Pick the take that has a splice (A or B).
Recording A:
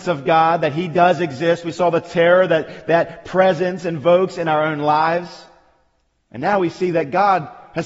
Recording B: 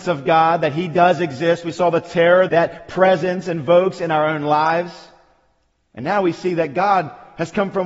B